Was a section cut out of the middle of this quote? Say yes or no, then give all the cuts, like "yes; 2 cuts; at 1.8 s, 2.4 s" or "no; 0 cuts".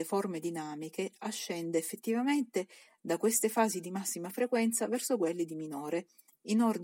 no; 0 cuts